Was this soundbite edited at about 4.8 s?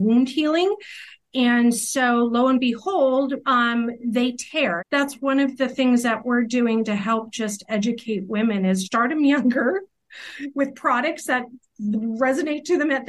yes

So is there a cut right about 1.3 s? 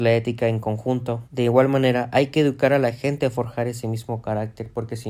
yes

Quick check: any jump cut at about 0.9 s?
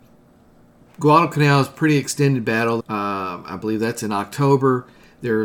no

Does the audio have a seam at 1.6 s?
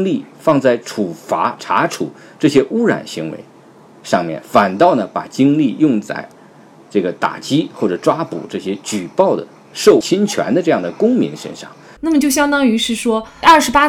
yes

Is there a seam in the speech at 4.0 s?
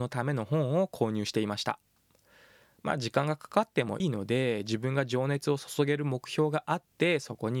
yes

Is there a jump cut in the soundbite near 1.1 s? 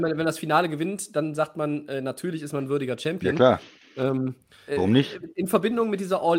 no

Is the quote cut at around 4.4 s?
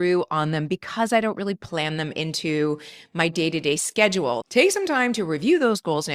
yes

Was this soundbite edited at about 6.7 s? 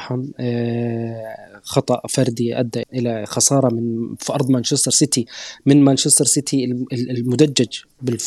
no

